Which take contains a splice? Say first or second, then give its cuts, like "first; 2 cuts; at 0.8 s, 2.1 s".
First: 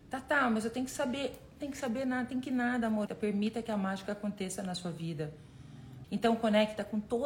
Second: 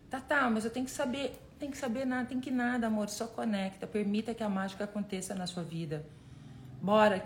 first; 2 cuts; at 3.1 s, 6.0 s